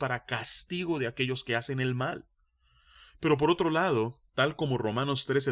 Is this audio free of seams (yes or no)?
no